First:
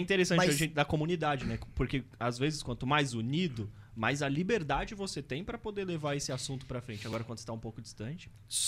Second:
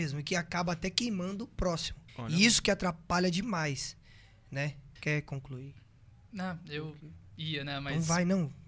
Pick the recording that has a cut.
second; 2 cuts; at 2.1 s, 5.0 s

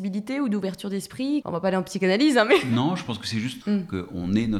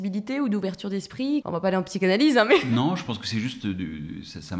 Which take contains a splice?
first; 1 cut; at 3.6 s

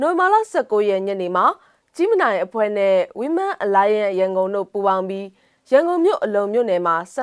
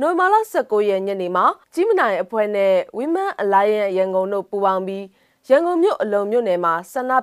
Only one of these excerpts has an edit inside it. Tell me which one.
second; 1 cut; at 1.6 s

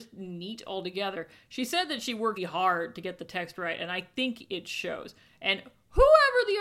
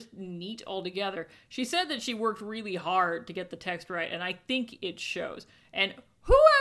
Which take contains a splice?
first; 1 cut; at 2.4 s

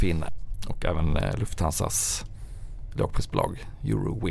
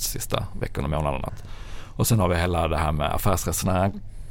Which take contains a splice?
second; 1 cut; at 1.3 s

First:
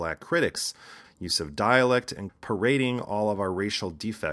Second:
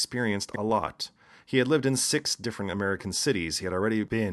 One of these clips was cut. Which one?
first; 2 cuts; at 1.0 s, 2.3 s

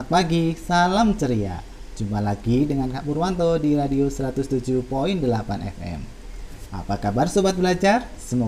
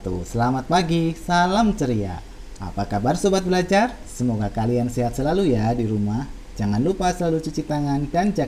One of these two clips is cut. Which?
second; 1 cut; at 2.6 s

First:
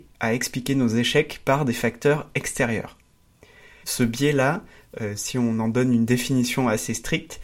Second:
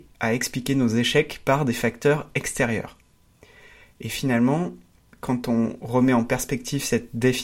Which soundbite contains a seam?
first; 1 cut; at 3.8 s

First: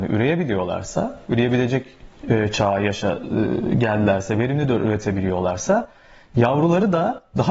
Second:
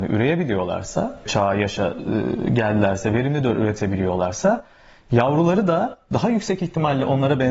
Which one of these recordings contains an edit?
second; 1 cut; at 1.3 s

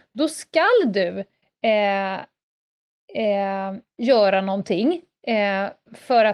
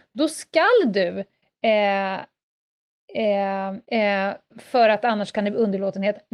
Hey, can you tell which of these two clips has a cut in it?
second; 1 cut; at 3.8 s

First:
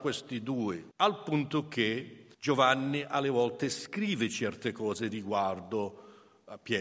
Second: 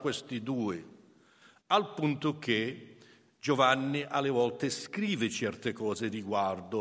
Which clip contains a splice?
first; 2 cuts; at 0.9 s, 2.3 s

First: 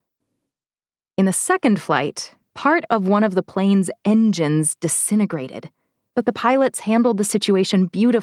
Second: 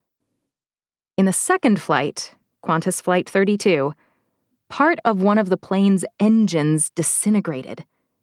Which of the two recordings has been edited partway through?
first; 2 cuts; at 2.5 s, 6.1 s

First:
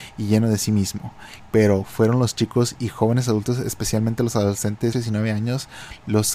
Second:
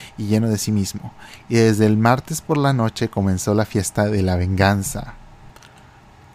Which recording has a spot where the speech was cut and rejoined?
first; 2 cuts; at 1.4 s, 4.9 s

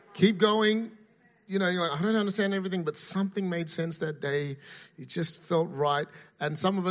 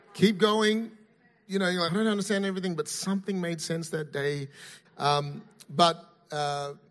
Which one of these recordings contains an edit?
second; 2 cuts; at 1.9 s, 4.8 s

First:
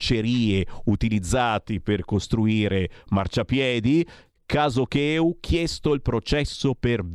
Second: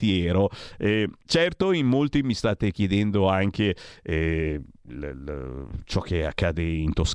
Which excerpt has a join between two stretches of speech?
second; 1 cut; at 1.2 s

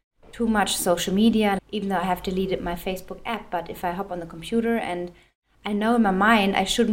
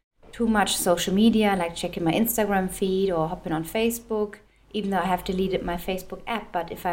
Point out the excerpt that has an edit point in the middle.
first; 1 cut; at 1.6 s

